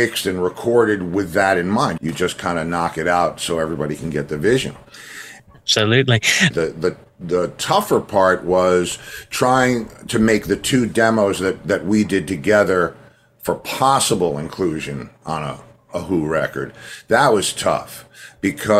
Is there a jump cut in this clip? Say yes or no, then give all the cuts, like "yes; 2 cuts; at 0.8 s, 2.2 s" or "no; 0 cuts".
yes; 3 cuts; at 2.0 s, 5.4 s, 6.5 s